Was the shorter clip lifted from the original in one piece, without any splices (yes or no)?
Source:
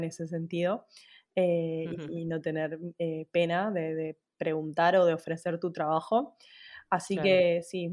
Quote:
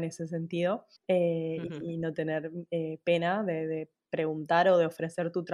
no